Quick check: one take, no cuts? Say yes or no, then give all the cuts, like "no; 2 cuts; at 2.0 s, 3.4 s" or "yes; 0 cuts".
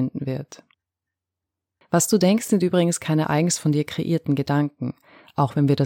yes; 0 cuts